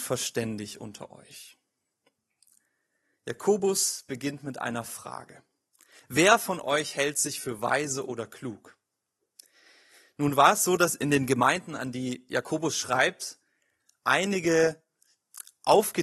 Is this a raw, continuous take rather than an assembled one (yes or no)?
yes